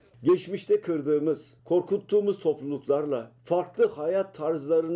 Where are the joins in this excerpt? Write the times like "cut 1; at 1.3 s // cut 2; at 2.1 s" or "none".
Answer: cut 1; at 1.6 s // cut 2; at 3.4 s